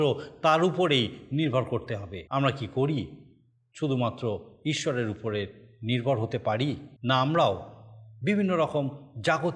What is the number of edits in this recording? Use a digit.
2